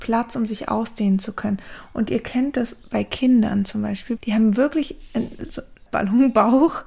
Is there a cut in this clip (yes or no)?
yes